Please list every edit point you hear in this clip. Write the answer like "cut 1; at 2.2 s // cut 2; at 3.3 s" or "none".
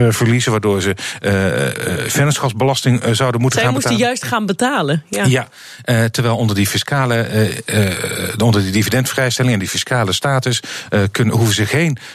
none